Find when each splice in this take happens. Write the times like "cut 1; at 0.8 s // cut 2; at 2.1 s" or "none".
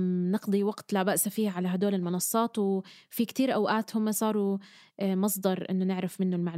none